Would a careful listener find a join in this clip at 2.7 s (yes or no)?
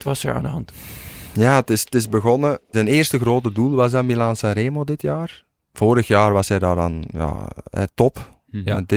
yes